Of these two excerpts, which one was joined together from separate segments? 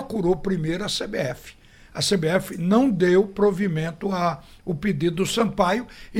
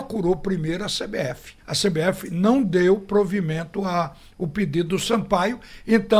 second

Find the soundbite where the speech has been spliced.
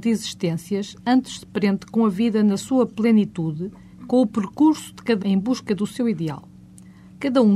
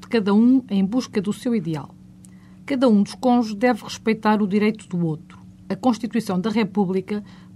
first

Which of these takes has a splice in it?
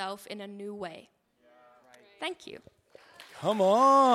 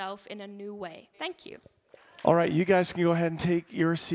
second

